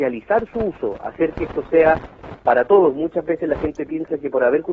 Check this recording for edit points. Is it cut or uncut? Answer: uncut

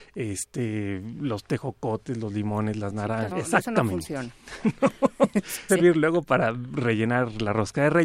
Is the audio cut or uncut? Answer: cut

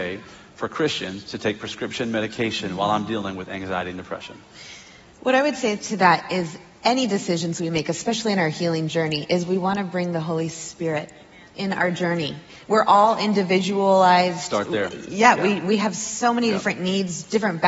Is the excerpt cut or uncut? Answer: uncut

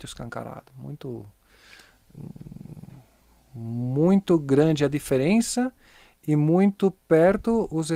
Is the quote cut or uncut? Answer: uncut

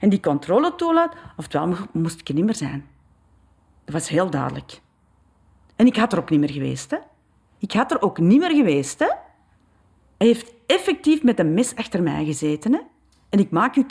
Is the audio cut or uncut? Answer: uncut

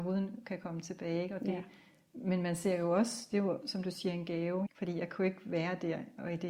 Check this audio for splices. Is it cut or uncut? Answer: cut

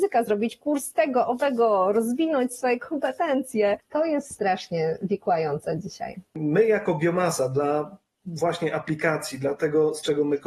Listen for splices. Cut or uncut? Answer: uncut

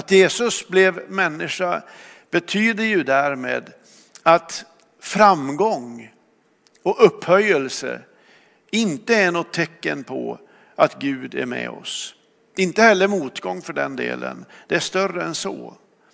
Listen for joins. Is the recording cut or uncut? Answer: uncut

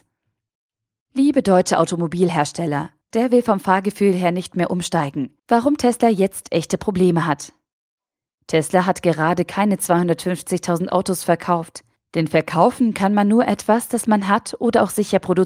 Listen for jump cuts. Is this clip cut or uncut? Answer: cut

